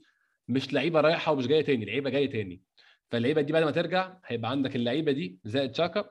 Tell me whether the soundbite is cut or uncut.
uncut